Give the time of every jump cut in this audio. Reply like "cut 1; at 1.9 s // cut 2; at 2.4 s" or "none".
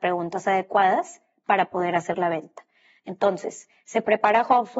none